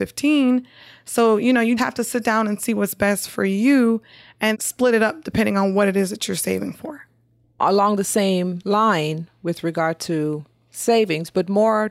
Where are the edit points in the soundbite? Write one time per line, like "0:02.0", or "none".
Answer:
0:01.8
0:04.5